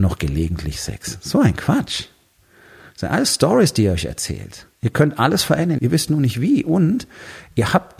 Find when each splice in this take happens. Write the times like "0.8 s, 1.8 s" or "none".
5.8 s